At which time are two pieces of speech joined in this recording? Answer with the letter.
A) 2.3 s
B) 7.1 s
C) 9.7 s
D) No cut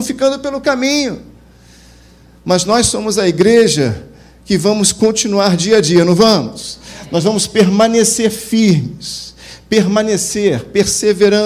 D